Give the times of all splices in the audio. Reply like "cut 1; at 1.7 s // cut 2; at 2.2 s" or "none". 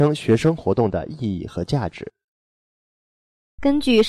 none